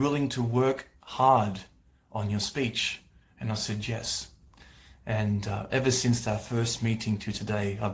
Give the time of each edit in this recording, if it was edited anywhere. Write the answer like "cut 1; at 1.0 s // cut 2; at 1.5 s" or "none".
none